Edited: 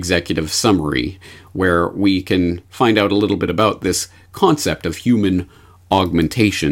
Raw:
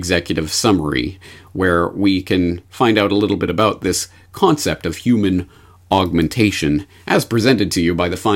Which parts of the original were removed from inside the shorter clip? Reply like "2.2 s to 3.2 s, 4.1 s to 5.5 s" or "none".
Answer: none